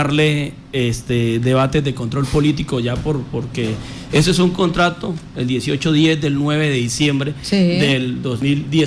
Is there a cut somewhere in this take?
yes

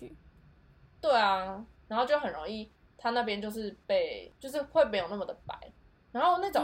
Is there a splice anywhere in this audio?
no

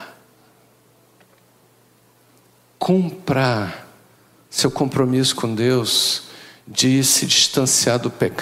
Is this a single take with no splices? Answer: yes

